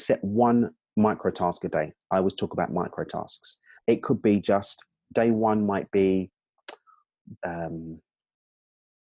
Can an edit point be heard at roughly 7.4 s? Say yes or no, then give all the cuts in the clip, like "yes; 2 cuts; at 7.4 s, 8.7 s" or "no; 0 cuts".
yes; 2 cuts; at 3.8 s, 7.4 s